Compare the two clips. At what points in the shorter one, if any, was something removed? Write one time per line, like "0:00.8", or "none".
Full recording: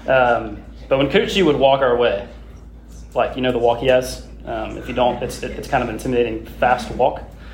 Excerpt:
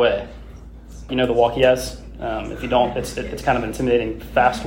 0:01.1